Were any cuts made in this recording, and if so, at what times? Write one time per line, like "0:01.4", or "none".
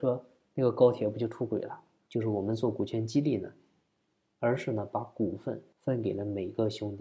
0:02.1
0:04.3
0:05.7